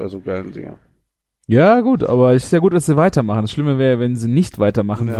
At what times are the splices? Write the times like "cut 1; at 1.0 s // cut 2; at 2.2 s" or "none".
none